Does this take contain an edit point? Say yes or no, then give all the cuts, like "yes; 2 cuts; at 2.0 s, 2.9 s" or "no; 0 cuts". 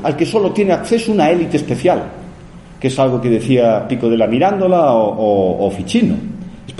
no; 0 cuts